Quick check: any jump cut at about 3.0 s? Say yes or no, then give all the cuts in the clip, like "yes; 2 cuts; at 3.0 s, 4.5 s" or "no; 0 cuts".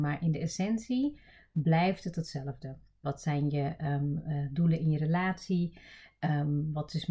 yes; 1 cut; at 3.0 s